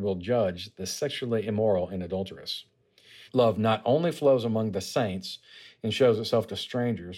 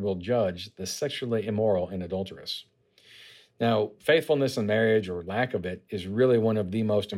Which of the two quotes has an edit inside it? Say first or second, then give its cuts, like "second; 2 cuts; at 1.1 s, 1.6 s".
first; 1 cut; at 3.3 s